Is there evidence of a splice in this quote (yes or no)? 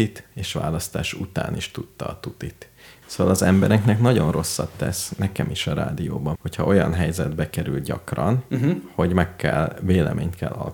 yes